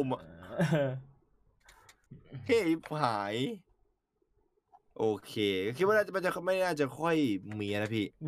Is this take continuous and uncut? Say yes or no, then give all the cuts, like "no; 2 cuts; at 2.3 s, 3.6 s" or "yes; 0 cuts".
yes; 0 cuts